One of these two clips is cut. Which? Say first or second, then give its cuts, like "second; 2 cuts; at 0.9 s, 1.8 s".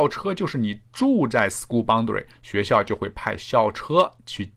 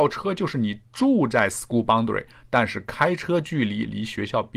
first; 1 cut; at 2.3 s